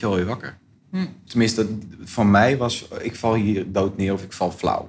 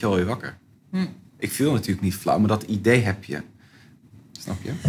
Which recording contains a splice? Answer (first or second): first